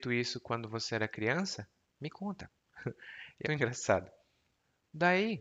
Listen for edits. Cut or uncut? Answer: cut